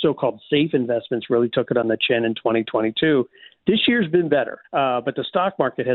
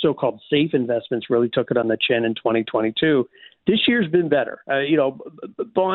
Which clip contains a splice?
first; 1 cut; at 4.6 s

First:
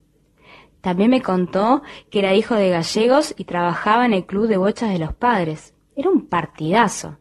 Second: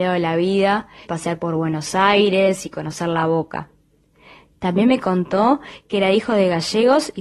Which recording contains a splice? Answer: second; 1 cut; at 1.0 s

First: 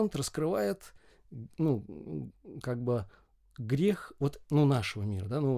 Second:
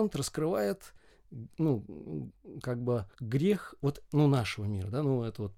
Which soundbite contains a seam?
second; 1 cut; at 3.1 s

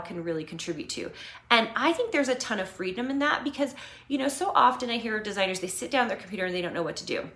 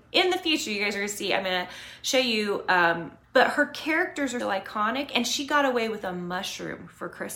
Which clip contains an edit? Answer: second; 2 cuts; at 3.2 s, 4.4 s

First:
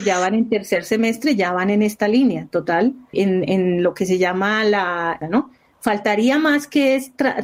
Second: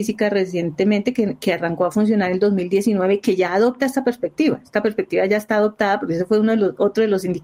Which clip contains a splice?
first; 2 cuts; at 3.1 s, 5.2 s

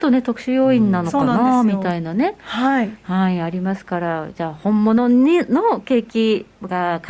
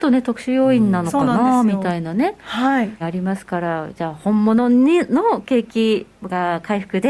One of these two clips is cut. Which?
second; 1 cut; at 3.0 s

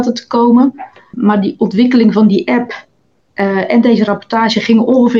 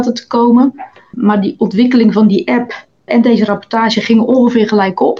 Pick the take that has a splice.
second; 1 cut; at 3.1 s

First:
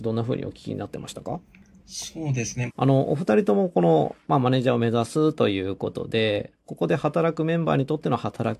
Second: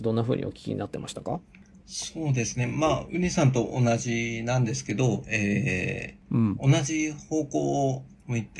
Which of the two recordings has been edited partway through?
first; 1 cut; at 2.7 s

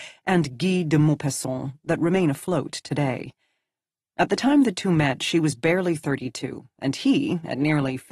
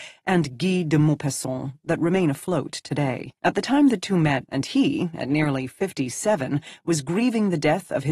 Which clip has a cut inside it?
second; 2 cuts; at 3.4 s, 4.4 s

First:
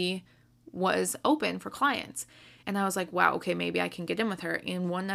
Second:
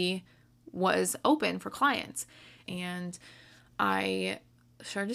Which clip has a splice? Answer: second; 1 cut; at 2.6 s

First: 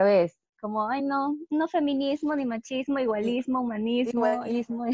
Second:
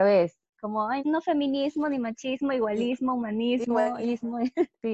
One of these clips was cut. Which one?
second; 1 cut; at 1.0 s

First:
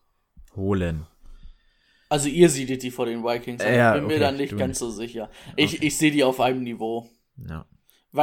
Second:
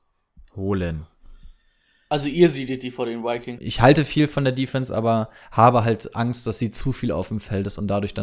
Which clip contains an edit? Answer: second; 1 cut; at 3.6 s

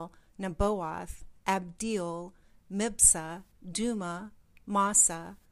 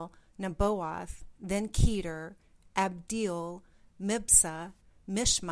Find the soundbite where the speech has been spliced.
first; 2 cuts; at 1.4 s, 3.6 s

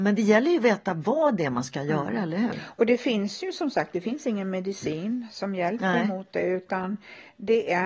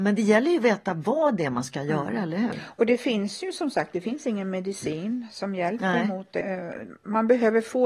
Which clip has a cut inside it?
second; 1 cut; at 6.4 s

